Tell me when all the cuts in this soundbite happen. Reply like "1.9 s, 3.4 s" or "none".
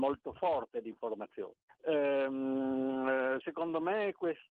1.7 s, 3.4 s